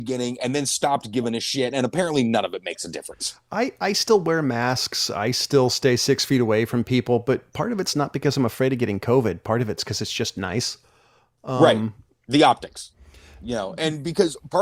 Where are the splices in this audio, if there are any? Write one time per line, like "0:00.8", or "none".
none